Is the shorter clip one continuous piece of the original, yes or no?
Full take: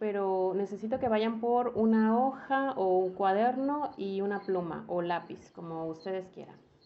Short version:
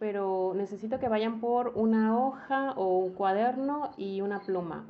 yes